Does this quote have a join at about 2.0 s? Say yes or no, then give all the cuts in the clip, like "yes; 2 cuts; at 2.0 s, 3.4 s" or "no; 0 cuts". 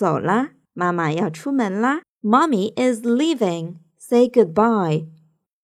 yes; 1 cut; at 2.0 s